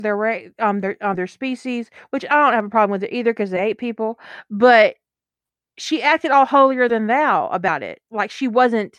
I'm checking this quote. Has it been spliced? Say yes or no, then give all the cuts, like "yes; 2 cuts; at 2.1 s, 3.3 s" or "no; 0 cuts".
no; 0 cuts